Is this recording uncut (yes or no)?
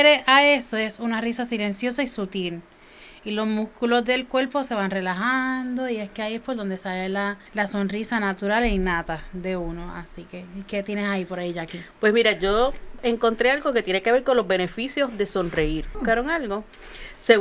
no